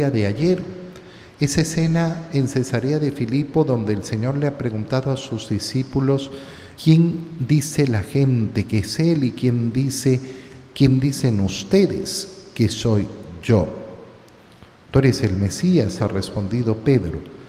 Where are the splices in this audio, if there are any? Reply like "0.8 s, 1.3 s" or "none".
6.8 s, 16.0 s